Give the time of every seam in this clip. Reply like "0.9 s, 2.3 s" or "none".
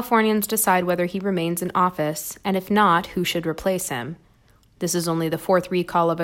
none